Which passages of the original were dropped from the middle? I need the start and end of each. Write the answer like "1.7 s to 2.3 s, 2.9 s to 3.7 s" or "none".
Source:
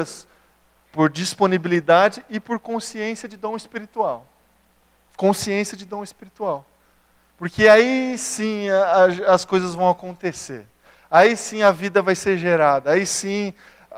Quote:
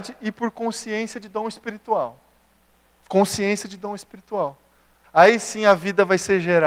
7.1 s to 11.0 s

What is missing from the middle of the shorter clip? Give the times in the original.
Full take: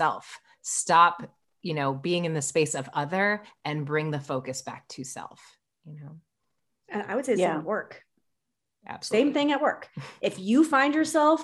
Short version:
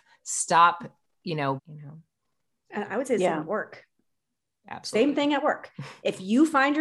1.9 s to 5.7 s

